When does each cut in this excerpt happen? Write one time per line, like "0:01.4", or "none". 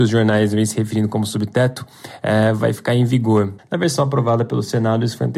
0:03.6